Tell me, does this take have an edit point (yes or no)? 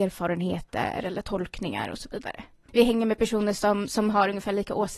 yes